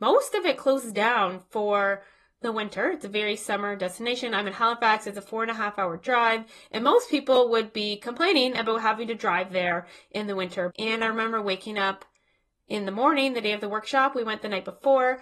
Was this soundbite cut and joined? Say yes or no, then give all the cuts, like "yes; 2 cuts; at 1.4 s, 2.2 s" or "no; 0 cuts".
yes; 1 cut; at 10.7 s